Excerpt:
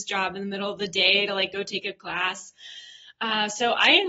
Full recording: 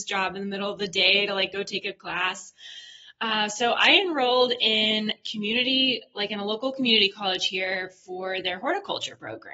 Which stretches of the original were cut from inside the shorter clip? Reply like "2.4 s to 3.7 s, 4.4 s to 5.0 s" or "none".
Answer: none